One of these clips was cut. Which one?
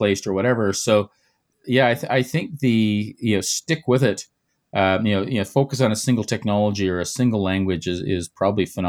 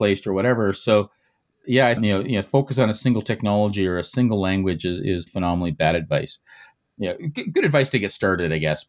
second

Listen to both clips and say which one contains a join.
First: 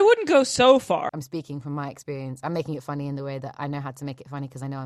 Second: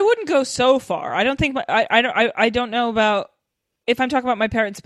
first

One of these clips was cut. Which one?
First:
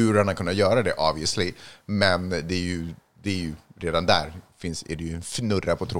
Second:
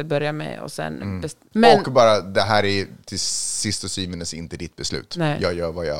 second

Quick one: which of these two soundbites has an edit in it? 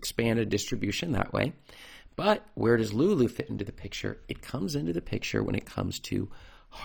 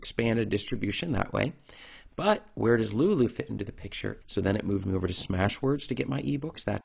second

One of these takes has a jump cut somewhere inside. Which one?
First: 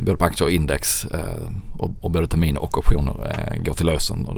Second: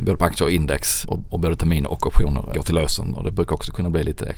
second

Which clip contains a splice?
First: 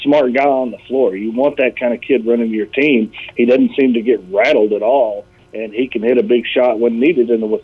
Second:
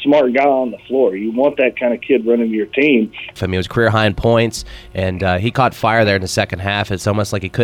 second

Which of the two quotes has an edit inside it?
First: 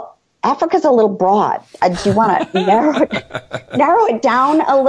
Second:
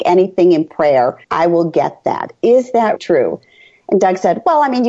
second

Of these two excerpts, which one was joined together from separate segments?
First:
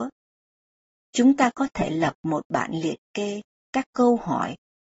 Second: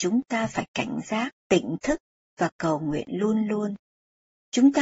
second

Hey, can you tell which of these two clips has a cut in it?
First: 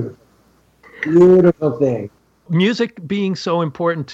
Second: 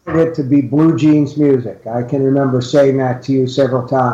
first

